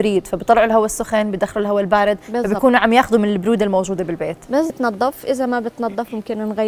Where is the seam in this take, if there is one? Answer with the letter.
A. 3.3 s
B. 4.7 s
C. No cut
B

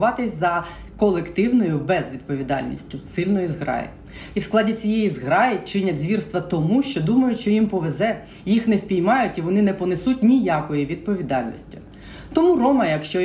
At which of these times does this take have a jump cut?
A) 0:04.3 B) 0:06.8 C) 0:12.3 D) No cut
A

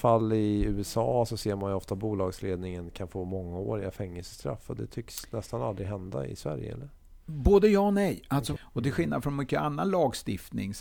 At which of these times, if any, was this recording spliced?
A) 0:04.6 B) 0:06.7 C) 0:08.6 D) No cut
C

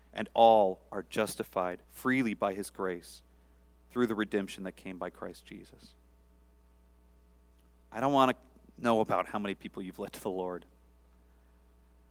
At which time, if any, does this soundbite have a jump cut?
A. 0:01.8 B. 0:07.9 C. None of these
A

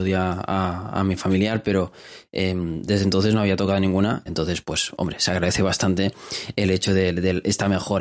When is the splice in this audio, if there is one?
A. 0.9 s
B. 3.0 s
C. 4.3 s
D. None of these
C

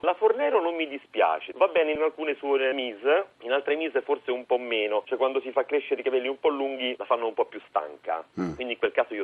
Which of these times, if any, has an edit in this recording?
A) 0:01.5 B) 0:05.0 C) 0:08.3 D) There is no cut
D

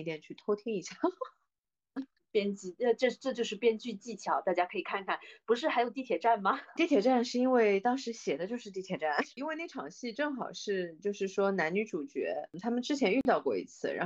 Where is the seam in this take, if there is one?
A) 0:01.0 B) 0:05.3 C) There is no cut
C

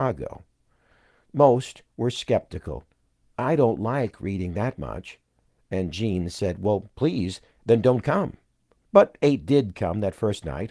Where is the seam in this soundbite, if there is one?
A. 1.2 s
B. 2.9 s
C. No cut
A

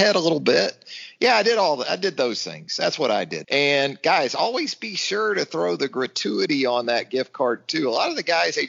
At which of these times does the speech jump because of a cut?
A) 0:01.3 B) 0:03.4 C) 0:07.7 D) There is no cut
B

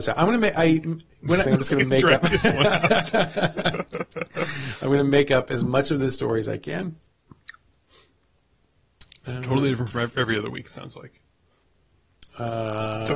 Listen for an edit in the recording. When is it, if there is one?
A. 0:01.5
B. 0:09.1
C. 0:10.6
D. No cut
A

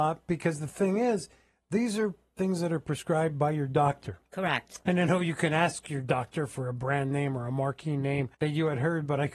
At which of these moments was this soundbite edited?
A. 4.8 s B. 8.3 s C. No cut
B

